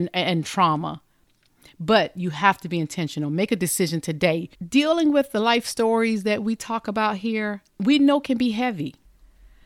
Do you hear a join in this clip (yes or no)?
yes